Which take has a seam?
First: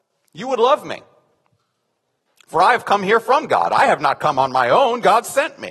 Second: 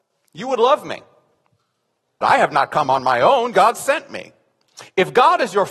second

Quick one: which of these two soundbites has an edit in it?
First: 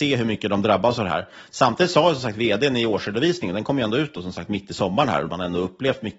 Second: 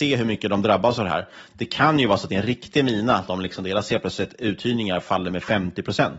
first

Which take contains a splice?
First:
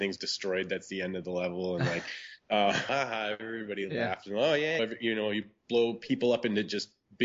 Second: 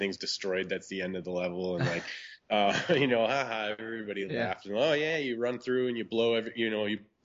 first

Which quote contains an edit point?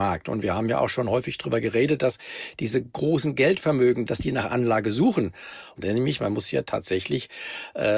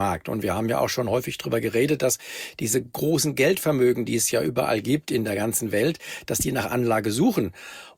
first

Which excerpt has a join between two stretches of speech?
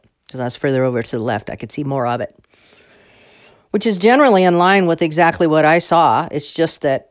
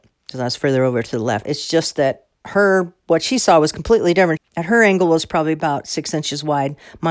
second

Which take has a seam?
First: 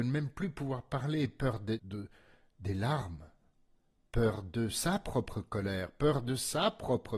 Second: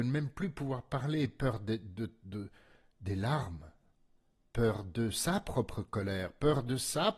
first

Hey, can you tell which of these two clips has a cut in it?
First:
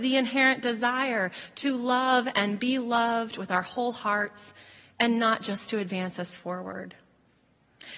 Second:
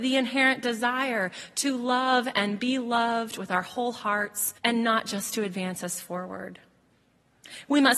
second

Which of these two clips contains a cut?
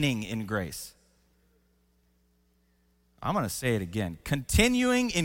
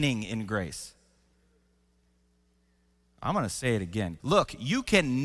second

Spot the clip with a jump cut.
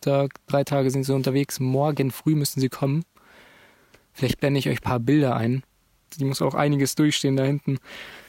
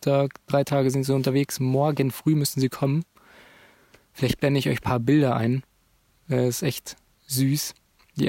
first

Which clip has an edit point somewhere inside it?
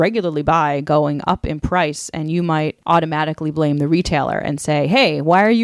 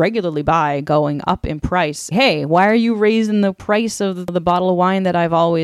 second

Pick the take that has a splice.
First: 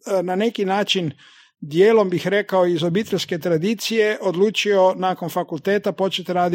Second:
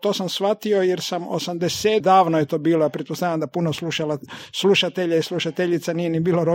second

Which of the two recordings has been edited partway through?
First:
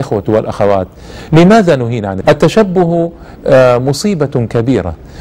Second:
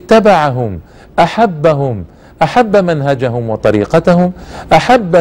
first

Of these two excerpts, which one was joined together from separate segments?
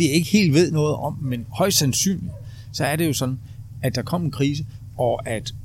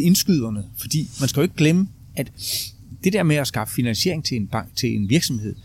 first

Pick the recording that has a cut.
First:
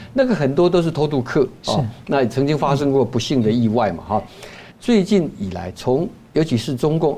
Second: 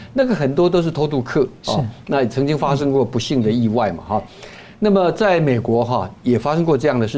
first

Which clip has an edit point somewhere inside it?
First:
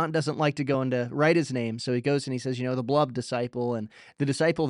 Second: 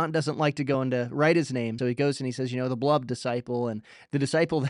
second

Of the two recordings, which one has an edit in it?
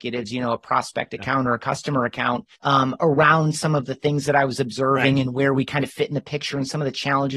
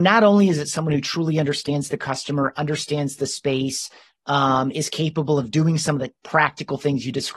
first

